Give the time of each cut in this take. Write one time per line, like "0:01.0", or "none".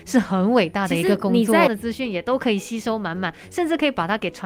0:01.7